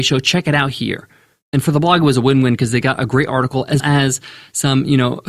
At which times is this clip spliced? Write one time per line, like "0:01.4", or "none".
0:03.8